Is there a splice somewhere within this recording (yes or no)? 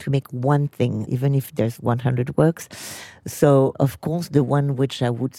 no